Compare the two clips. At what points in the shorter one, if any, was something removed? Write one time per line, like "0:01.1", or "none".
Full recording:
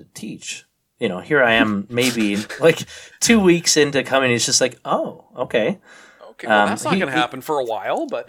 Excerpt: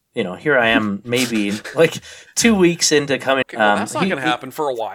0:03.4